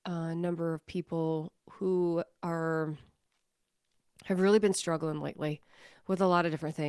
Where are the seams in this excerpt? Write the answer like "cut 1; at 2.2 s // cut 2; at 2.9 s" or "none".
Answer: none

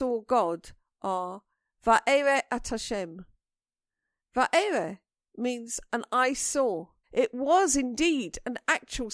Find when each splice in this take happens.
cut 1; at 7.0 s

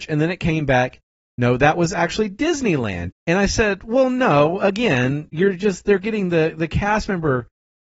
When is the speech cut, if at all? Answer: cut 1; at 3.1 s

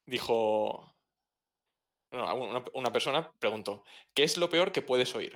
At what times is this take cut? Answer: none

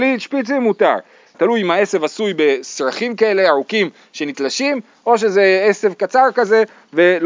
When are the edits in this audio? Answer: cut 1; at 1.3 s

